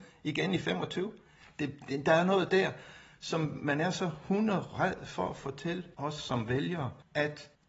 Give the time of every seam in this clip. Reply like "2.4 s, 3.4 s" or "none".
none